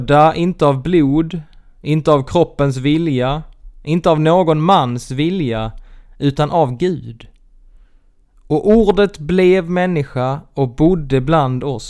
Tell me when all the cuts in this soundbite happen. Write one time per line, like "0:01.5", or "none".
none